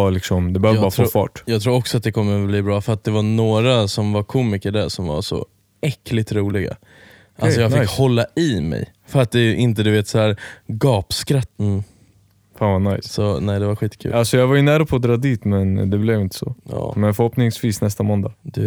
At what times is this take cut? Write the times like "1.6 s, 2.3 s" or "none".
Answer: 11.6 s